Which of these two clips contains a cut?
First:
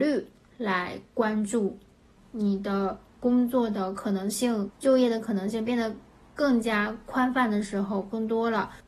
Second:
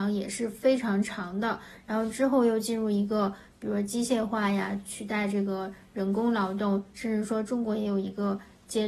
first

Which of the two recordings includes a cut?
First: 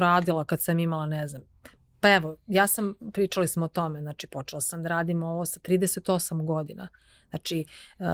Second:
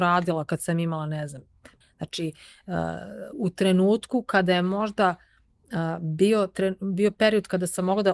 second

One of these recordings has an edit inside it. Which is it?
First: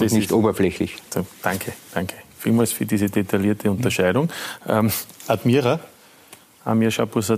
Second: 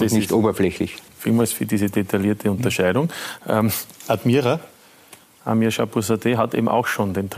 second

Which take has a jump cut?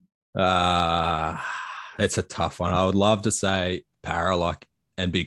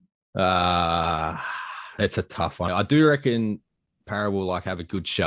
second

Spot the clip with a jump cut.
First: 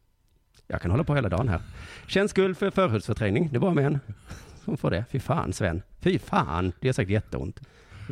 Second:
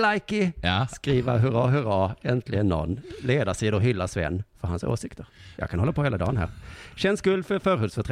second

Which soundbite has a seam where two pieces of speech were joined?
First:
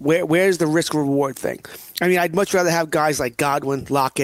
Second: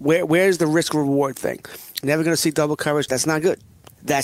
second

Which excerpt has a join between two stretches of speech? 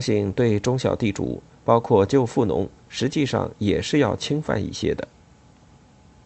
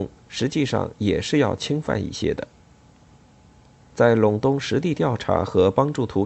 second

